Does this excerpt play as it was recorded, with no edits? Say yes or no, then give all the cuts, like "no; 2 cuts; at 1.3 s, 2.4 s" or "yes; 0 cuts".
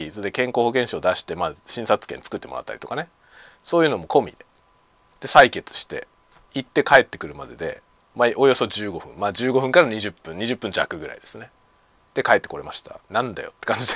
no; 1 cut; at 13.0 s